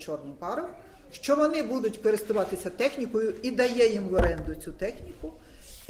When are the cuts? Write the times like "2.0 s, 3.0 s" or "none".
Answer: none